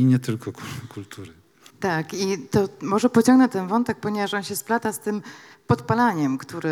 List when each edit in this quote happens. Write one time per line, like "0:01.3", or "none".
0:01.7